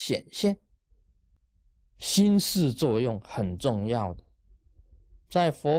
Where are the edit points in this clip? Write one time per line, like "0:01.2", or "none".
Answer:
none